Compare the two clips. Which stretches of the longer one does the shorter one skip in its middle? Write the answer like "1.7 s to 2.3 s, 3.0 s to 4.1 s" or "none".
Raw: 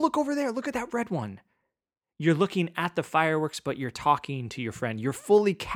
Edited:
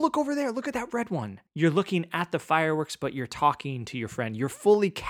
1.5 s to 2.1 s